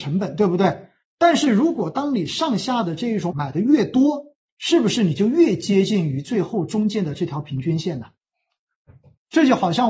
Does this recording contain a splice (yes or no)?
yes